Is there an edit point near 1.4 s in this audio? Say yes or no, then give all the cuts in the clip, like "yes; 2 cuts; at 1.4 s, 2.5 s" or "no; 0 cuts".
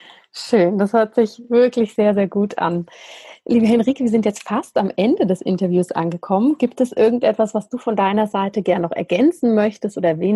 no; 0 cuts